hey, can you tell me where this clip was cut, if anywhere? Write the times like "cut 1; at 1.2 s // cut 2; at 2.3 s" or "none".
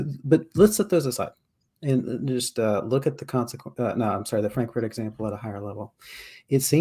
none